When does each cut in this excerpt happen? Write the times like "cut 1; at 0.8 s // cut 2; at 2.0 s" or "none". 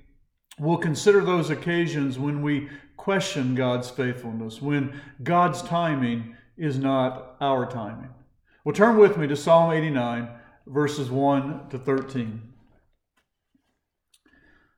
none